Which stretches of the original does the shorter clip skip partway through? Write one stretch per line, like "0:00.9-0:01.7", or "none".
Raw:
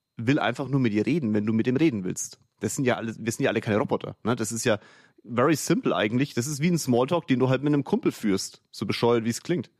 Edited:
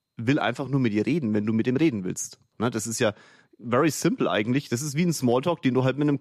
0:02.5-0:04.2